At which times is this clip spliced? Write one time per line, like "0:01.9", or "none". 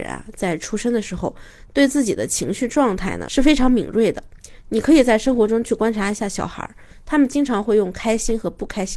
0:01.7

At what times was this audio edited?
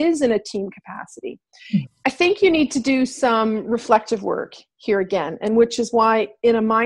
0:01.9

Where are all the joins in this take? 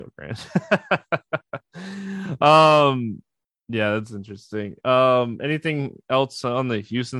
none

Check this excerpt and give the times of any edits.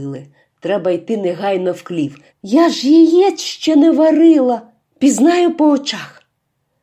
0:02.3
0:04.8

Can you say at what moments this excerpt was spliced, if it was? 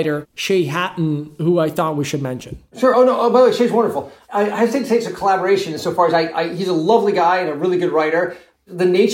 none

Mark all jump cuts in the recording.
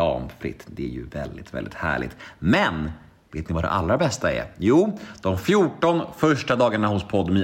none

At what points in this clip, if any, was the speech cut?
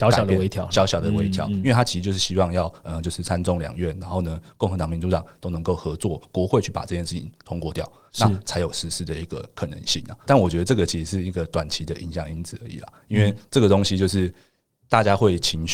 0:10.3

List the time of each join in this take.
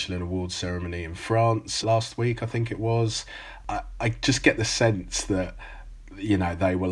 0:01.8

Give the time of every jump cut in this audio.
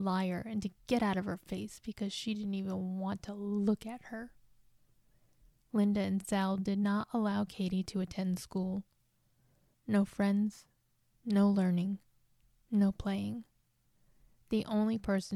0:09.7

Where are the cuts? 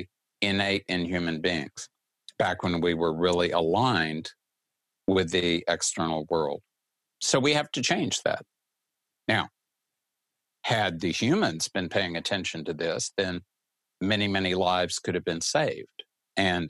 0:09.1

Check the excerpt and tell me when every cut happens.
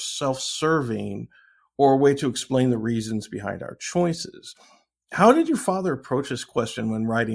none

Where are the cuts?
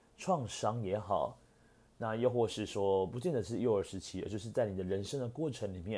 none

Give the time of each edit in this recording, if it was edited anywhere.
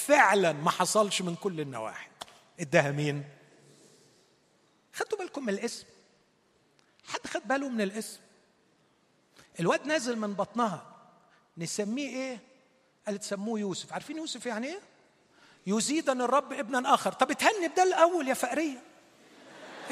none

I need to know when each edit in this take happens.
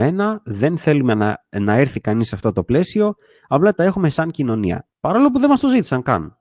0:04.9

